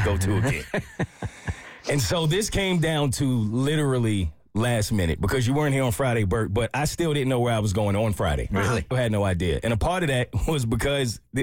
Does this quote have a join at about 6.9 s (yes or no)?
no